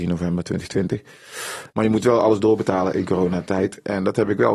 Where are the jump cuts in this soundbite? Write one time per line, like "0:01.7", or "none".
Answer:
0:01.7